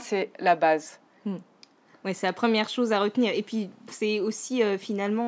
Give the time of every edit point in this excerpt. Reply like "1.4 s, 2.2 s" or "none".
none